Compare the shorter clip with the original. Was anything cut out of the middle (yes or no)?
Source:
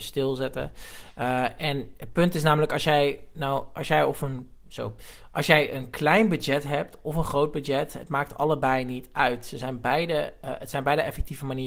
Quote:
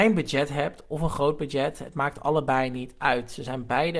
no